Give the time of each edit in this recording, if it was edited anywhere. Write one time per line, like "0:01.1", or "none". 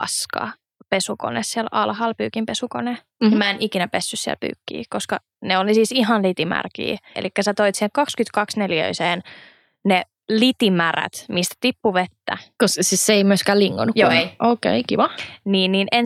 0:07.1